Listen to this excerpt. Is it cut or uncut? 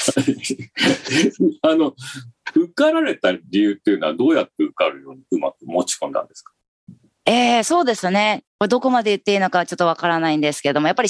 cut